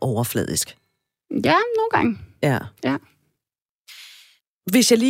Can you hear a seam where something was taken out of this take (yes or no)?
no